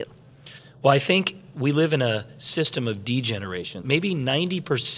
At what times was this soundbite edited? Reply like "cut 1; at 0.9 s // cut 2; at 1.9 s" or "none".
cut 1; at 3.8 s